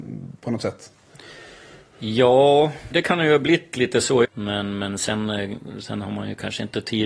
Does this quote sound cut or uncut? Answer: cut